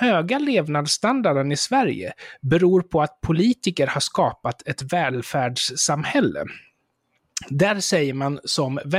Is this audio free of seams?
yes; 0 cuts

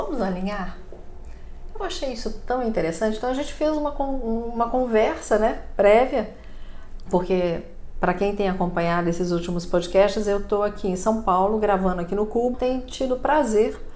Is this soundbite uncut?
no; 2 cuts; at 7.1 s, 12.5 s

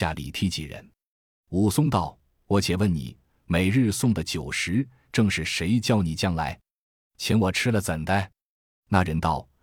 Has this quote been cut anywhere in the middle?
no; 0 cuts

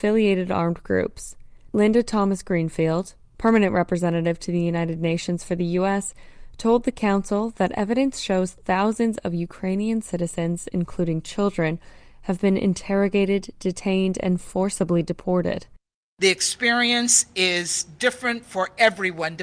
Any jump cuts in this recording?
no; 0 cuts

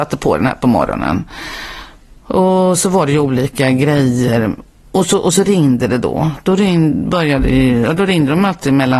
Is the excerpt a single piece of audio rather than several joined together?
yes; 0 cuts

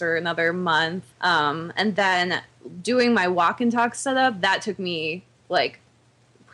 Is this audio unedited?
no; 1 cut; at 1.1 s

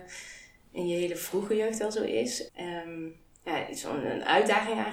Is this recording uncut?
no; 1 cut; at 2.5 s

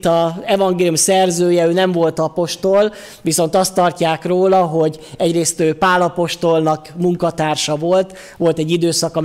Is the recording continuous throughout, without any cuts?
yes; 0 cuts

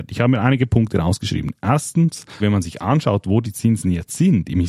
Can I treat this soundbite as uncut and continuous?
no; 1 cut; at 2.4 s

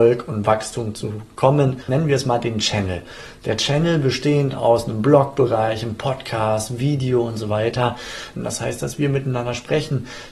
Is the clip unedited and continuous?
no; 2 cuts; at 1.8 s, 8.4 s

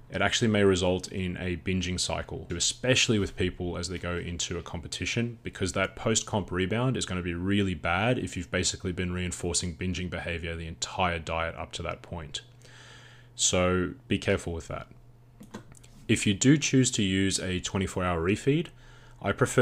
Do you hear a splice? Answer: yes; 1 cut; at 2.5 s

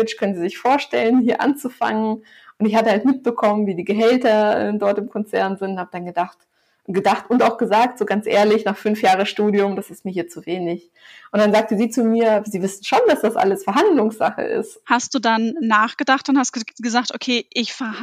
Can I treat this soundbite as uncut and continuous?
no; 1 cut; at 14.8 s

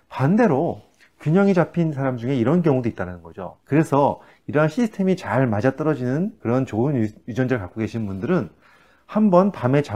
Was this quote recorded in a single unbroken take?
no; 1 cut; at 3.6 s

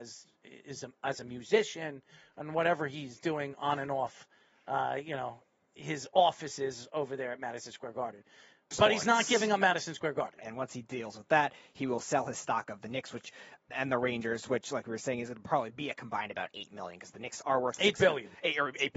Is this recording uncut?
no; 3 cuts; at 8.7 s, 10.4 s, 13.7 s

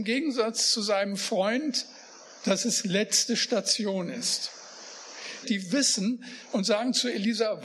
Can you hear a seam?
yes; 1 cut; at 5.4 s

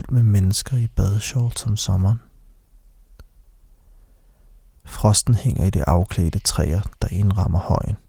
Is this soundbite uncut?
no; 1 cut; at 4.8 s

